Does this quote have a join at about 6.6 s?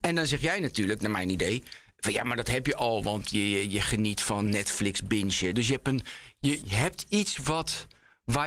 yes; 2 cuts; at 5.5 s, 6.6 s

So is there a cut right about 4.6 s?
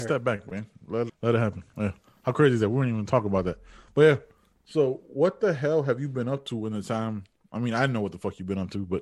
no; 1 cut; at 1.1 s

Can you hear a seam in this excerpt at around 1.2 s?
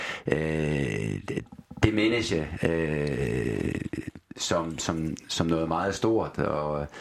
no; 0 cuts

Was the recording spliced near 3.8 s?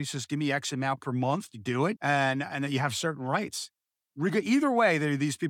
no; 1 cut; at 1.9 s

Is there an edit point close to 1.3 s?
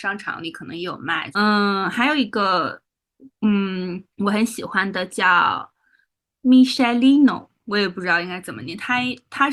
yes; 2 cuts; at 1.3 s, 4.1 s

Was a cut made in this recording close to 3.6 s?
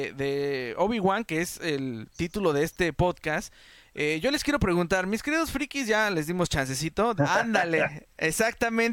no; 1 cut; at 7.2 s

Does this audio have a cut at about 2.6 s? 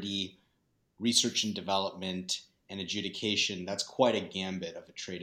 no; 0 cuts

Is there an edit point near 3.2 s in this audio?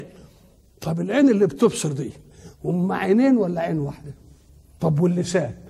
no; 1 cut; at 4.8 s

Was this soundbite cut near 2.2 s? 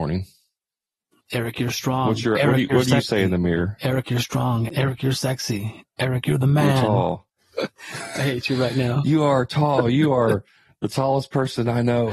no; 1 cut; at 7.3 s

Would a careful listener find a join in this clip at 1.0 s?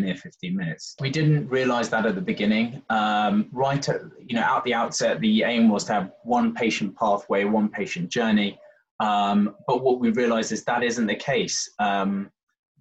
yes; 1 cut; at 1.0 s

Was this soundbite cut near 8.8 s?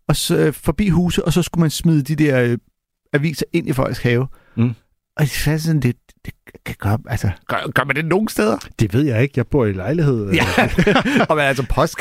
no; 2 cuts; at 7.4 s, 10.8 s

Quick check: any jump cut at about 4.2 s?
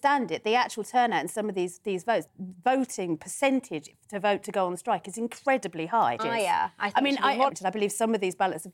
no; 3 cuts; at 2.3 s, 6.2 s, 7.5 s

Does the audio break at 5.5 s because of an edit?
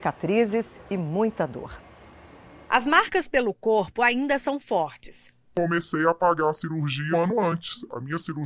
yes; 2 cuts; at 5.5 s, 7.1 s

